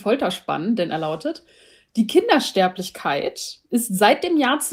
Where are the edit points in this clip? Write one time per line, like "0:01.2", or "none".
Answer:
none